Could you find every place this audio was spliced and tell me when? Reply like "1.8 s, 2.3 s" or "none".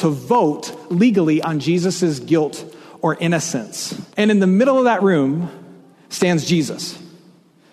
4.1 s